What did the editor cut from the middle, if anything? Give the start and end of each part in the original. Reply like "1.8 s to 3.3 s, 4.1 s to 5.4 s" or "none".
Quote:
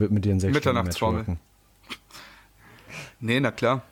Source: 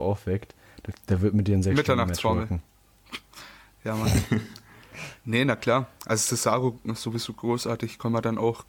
3.8 s to 4.6 s